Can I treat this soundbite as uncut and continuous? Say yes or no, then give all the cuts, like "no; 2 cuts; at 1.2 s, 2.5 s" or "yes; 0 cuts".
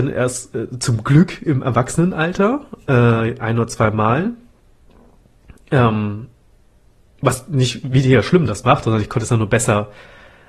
yes; 0 cuts